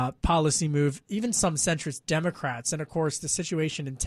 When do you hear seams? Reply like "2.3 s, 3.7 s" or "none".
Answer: none